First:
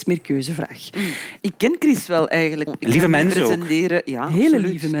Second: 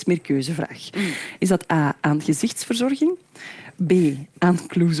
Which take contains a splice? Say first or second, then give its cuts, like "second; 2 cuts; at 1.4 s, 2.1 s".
first; 2 cuts; at 1.4 s, 2.7 s